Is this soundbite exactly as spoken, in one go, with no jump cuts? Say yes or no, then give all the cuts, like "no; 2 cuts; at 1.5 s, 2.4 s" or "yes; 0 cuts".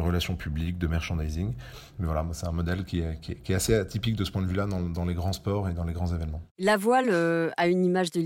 yes; 0 cuts